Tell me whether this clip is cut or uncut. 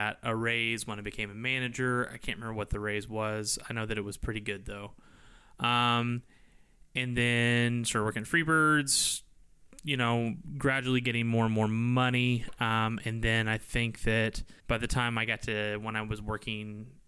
cut